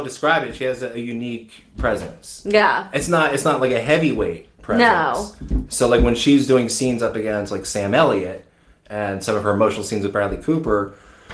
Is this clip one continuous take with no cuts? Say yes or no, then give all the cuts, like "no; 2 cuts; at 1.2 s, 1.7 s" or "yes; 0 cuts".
yes; 0 cuts